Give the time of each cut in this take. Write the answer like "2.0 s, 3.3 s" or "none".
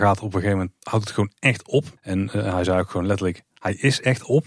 2.0 s